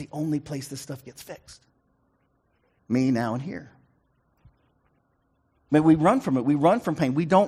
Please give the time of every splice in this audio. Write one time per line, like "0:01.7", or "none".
none

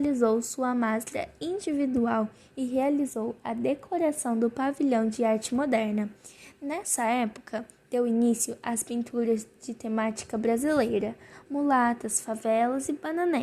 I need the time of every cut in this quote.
none

